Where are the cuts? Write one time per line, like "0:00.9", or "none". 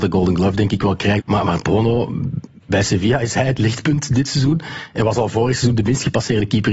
0:01.2